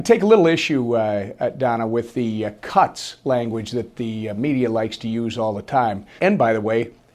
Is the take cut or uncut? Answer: cut